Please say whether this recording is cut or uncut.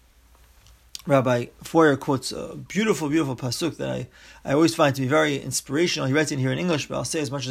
uncut